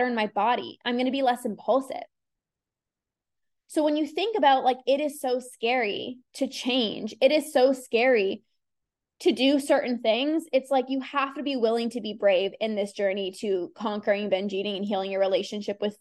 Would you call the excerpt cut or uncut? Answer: uncut